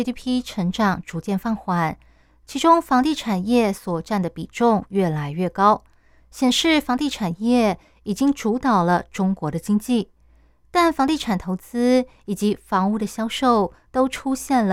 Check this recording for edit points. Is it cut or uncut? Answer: uncut